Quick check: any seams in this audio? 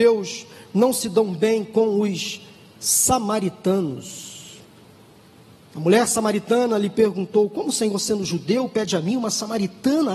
no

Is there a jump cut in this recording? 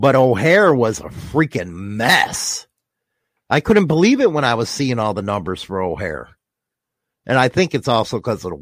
no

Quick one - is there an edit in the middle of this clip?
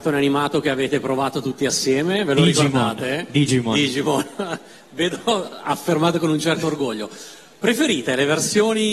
no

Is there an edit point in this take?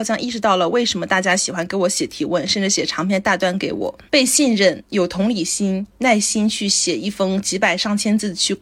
yes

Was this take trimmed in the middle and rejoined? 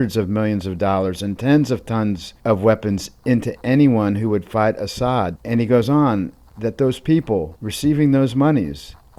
yes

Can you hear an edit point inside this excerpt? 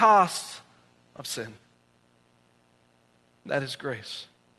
no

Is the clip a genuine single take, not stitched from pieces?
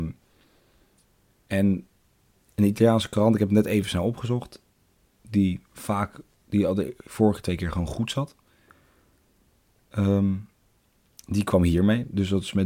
yes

